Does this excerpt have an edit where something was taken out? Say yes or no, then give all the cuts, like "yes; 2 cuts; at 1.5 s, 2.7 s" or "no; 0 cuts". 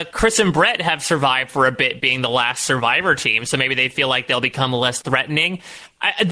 no; 0 cuts